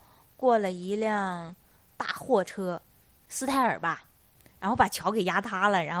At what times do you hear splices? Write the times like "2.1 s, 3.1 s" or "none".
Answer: none